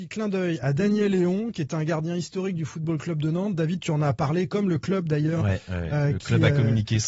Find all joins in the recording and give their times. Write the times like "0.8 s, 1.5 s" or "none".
none